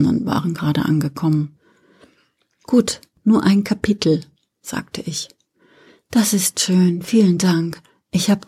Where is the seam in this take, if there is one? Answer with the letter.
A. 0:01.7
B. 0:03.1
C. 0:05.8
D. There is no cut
B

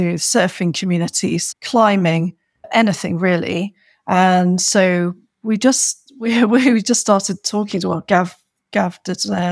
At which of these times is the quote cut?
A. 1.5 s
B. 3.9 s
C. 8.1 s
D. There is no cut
A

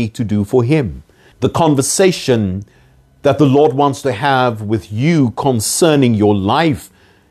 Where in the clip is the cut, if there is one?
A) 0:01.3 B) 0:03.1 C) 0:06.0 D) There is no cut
A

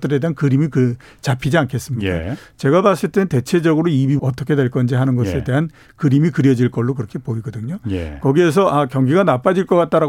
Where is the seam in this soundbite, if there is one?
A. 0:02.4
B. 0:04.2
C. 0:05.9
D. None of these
B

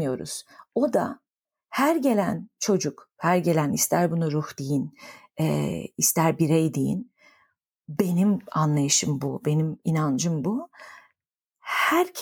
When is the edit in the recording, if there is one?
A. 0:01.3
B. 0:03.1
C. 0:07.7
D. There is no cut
D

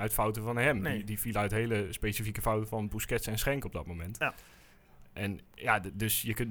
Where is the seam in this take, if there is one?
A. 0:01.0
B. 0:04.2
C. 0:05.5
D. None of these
C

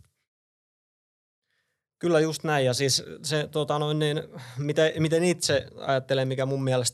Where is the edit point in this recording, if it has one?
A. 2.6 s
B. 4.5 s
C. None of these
C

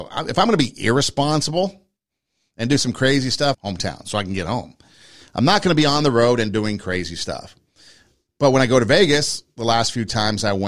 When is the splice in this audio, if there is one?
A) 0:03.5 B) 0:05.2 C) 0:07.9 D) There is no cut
A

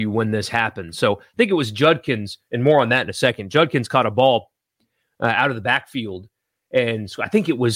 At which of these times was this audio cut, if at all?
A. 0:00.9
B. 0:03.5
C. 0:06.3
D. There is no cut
D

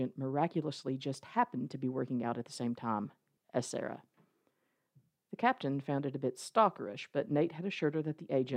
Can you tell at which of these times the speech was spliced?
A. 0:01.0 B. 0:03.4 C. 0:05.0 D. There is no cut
B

